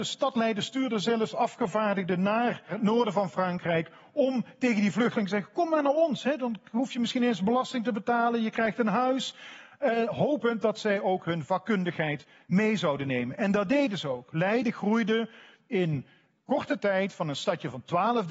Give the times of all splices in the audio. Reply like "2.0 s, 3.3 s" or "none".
none